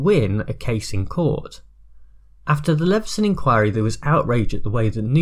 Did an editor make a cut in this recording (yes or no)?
no